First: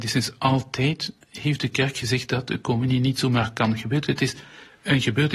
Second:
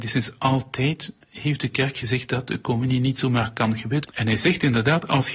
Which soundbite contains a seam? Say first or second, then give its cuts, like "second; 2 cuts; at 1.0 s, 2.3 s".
second; 1 cut; at 4.0 s